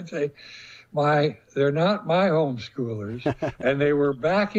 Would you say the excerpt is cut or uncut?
uncut